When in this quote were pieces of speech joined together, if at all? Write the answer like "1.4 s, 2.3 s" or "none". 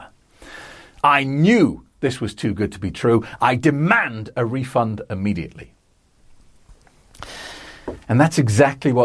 1.0 s, 8.0 s